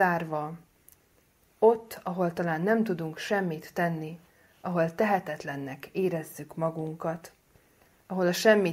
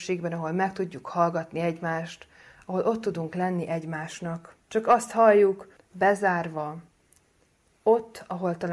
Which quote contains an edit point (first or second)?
second